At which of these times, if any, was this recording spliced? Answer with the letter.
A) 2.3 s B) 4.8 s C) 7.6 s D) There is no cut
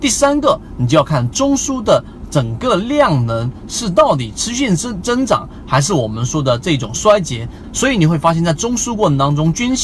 C